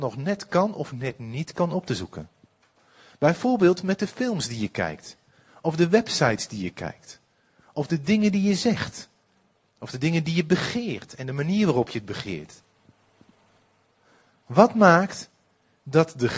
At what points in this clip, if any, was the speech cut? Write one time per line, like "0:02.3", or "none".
none